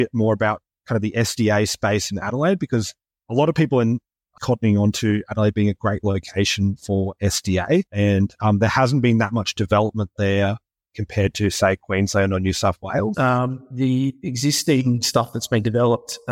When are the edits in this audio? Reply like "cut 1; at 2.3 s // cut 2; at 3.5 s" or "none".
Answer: cut 1; at 4.4 s // cut 2; at 7.9 s // cut 3; at 13.1 s